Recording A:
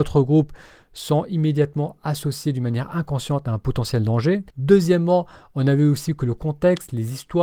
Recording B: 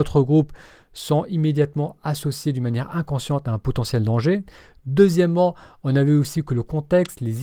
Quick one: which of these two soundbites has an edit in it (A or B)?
A